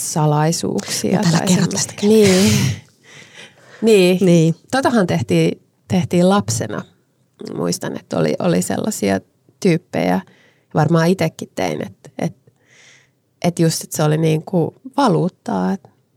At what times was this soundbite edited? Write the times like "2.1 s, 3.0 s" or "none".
none